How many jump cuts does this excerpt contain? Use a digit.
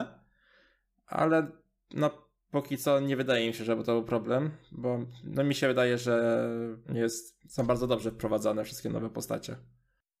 1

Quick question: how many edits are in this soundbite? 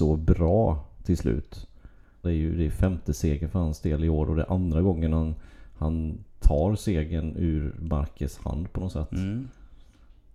1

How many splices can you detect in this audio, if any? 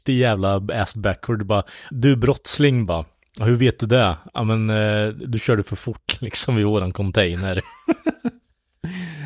1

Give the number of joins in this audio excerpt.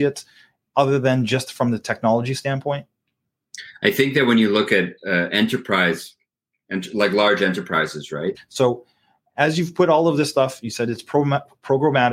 1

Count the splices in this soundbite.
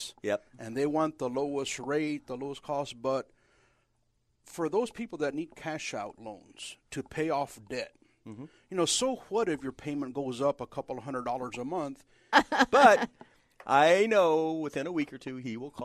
1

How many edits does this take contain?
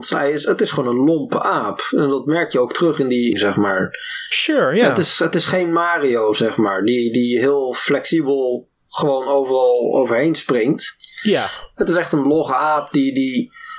1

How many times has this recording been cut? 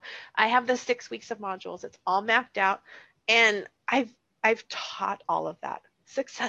1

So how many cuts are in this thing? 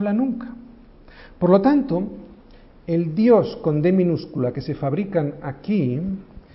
0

